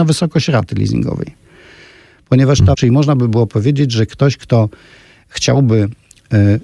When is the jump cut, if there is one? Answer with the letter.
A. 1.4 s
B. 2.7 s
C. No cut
B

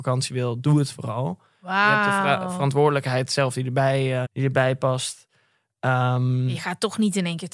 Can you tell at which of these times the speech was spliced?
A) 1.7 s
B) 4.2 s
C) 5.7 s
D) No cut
B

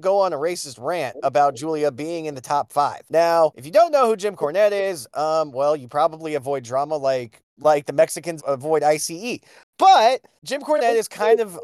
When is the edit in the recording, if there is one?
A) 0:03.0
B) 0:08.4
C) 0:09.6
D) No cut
B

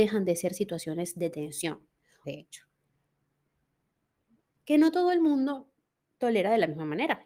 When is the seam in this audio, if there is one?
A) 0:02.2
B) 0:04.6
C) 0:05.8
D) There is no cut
A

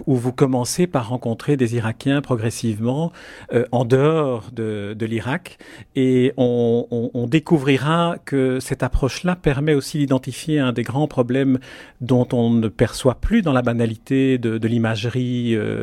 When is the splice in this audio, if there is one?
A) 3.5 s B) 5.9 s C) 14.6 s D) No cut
D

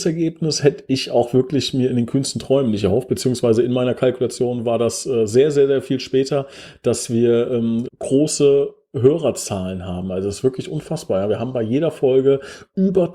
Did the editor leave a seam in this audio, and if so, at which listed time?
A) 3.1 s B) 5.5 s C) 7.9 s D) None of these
C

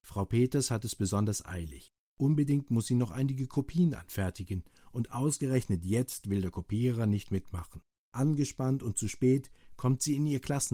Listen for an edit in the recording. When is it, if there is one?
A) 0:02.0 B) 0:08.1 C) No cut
C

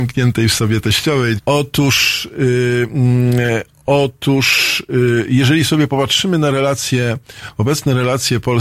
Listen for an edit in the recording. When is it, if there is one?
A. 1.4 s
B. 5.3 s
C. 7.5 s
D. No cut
A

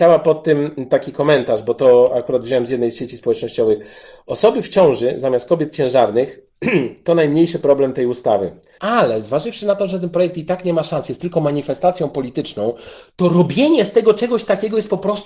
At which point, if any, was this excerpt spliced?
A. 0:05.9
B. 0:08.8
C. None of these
B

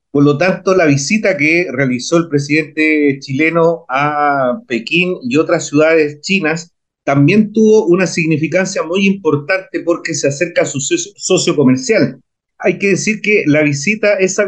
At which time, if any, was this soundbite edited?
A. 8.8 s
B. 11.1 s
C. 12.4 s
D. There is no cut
B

